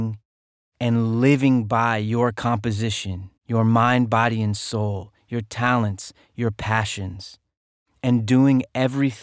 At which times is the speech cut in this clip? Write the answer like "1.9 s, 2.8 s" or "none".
3.4 s